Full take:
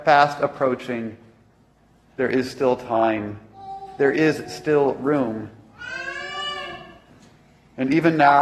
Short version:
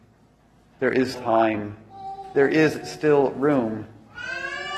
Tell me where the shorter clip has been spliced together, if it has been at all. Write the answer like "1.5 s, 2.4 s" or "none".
1.1 s